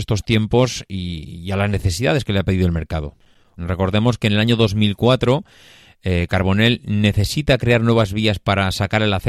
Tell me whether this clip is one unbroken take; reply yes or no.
no